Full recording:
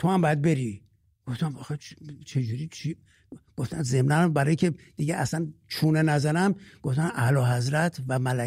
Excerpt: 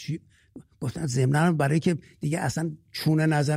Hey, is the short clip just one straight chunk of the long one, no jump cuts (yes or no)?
yes